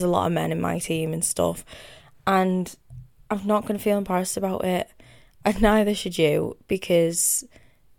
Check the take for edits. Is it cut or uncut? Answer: uncut